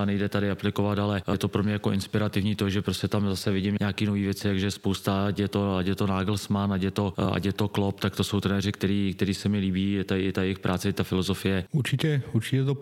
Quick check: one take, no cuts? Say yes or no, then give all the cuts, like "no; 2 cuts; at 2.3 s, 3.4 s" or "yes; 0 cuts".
no; 1 cut; at 11.7 s